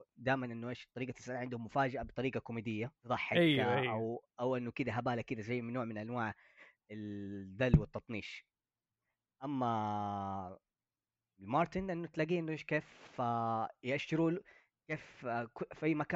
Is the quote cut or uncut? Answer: cut